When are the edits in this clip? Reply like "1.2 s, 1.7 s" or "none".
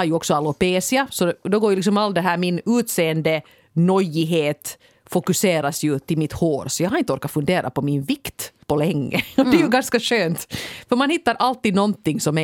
8.6 s